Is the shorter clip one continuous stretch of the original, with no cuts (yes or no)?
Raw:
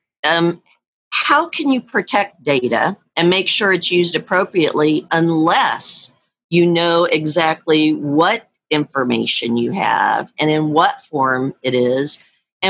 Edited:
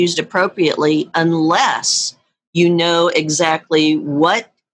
yes